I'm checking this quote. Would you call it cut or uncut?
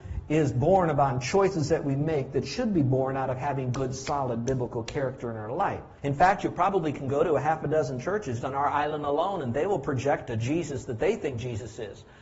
cut